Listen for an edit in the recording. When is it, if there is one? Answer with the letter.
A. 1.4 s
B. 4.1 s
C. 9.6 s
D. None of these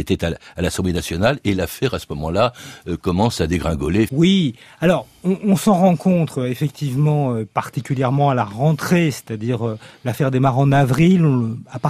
B